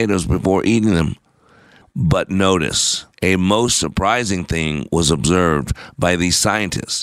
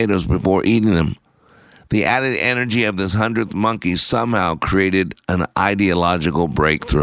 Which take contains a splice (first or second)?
first